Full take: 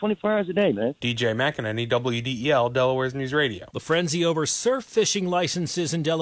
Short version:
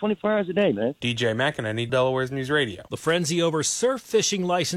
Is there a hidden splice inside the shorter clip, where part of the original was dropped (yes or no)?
yes